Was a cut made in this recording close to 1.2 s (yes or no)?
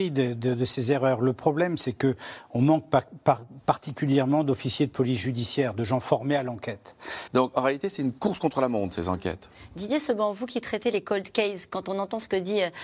no